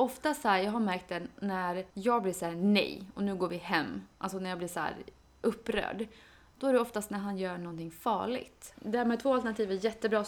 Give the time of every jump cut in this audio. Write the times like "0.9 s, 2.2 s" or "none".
1.9 s, 8.7 s